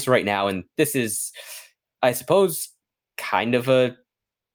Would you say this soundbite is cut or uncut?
uncut